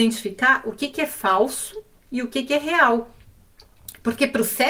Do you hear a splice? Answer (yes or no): no